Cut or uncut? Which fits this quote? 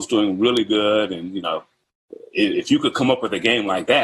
uncut